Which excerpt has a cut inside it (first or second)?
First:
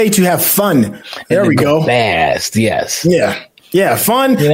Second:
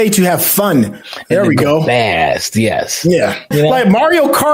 second